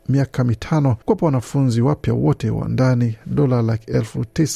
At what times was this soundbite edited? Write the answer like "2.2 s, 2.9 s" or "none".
1.0 s